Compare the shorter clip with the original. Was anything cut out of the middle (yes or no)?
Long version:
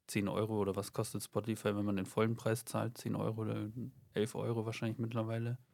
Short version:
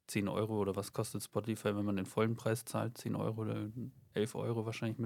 no